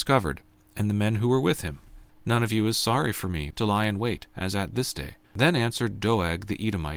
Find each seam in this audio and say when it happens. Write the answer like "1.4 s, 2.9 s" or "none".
2.1 s, 3.5 s, 5.2 s